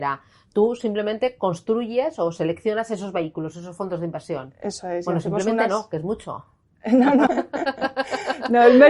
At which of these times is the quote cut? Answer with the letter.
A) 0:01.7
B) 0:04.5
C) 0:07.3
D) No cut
C